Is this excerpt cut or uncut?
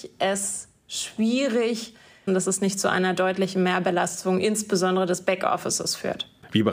cut